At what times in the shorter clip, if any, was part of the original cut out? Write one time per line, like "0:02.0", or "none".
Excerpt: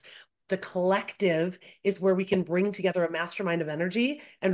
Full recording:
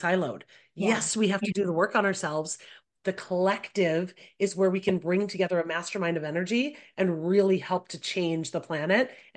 none